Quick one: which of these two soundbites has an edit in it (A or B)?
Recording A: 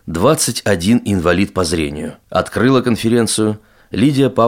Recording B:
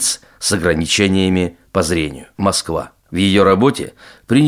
B